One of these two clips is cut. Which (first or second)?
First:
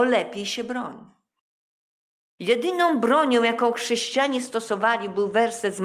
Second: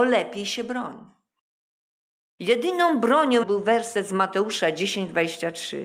second